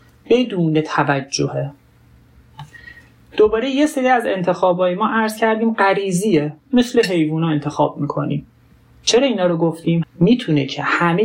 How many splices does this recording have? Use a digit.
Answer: 1